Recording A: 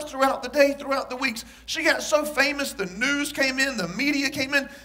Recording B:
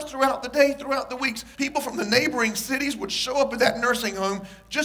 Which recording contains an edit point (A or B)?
B